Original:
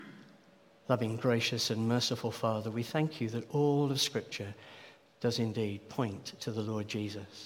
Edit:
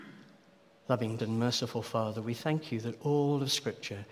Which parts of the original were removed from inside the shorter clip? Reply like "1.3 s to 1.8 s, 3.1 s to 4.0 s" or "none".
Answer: 1.2 s to 1.7 s